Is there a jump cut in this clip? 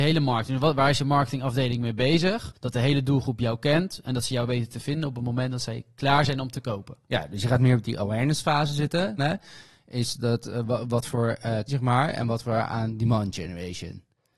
yes; 3 cuts; at 2.5 s, 9.2 s, 11.7 s

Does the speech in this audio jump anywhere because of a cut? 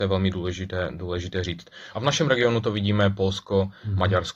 yes; 1 cut; at 1.9 s

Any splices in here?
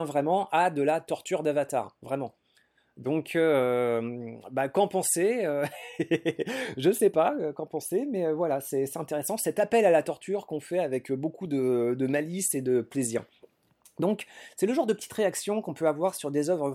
no; 0 cuts

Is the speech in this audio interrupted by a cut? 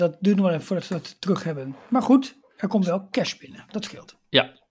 no; 0 cuts

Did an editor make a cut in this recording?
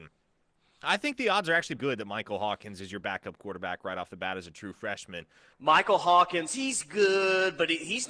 yes; 2 cuts; at 1.8 s, 5.5 s

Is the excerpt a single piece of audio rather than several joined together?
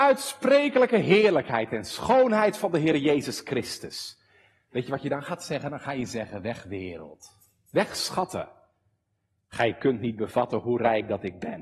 yes; 0 cuts

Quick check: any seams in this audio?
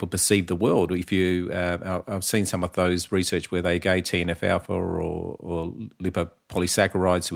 no; 0 cuts

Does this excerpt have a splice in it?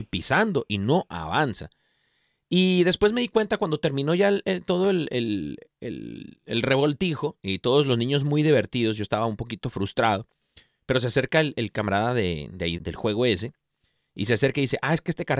yes; 1 cut; at 12.8 s

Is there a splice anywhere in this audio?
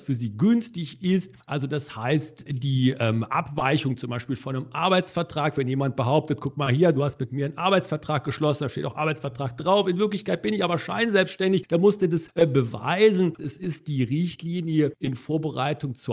yes; 2 cuts; at 2.5 s, 13.4 s

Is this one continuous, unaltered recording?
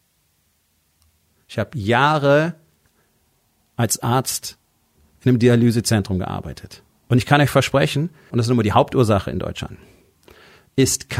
no; 1 cut; at 8.3 s

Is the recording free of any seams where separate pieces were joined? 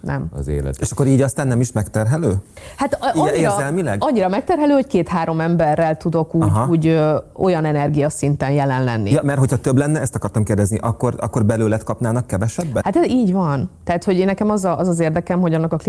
no; 1 cut; at 12.8 s

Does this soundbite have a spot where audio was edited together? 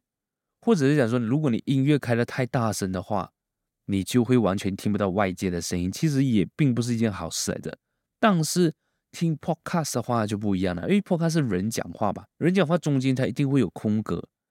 yes; 1 cut; at 12.3 s

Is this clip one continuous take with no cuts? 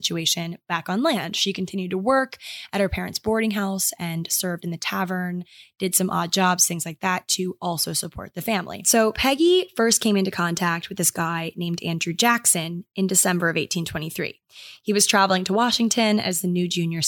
yes; 0 cuts

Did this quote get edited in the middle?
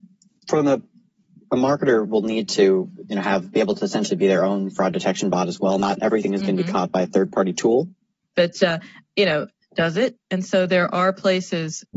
yes; 2 cuts; at 8.3 s, 9.6 s

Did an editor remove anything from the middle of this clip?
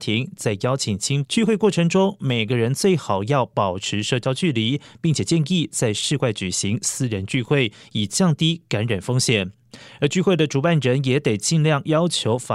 yes; 1 cut; at 1.2 s

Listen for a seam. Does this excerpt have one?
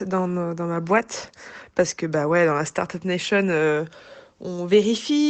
no; 0 cuts

